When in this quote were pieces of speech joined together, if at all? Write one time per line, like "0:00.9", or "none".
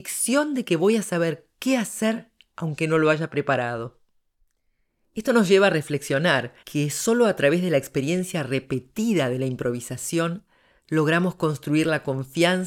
0:06.6